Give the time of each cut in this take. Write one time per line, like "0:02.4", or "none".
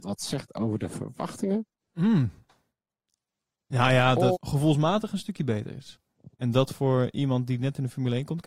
0:04.3
0:06.3

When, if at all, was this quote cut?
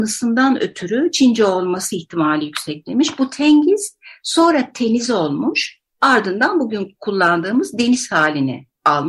none

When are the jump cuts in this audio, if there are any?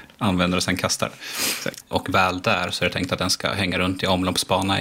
0:01.8

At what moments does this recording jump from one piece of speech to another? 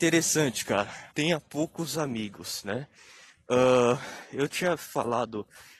0:01.1

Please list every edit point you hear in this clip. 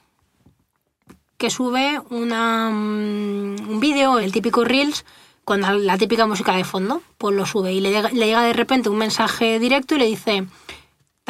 0:04.2

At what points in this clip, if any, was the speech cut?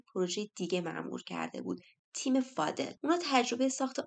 0:03.0

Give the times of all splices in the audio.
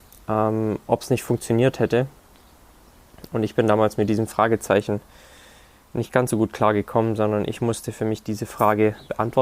none

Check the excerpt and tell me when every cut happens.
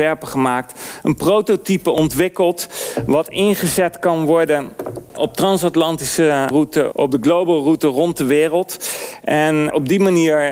0:05.1
0:06.9

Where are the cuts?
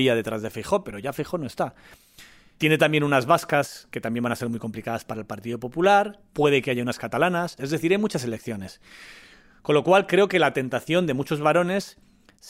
0:07.6

